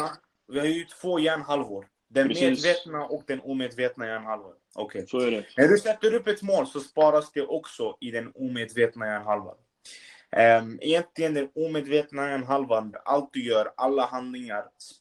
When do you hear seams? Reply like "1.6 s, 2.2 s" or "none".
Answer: 12.9 s